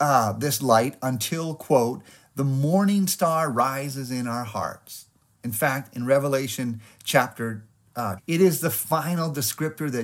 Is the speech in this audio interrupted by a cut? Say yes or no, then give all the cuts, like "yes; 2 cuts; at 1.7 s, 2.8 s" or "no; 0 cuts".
yes; 2 cuts; at 5.3 s, 8.2 s